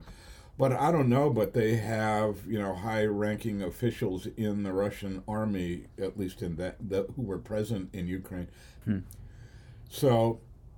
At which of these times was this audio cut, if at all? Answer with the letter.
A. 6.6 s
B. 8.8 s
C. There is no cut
B